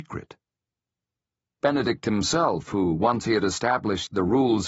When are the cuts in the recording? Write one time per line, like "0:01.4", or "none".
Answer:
0:01.6